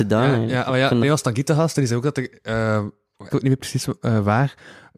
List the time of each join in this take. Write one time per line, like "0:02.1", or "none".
0:01.0
0:03.3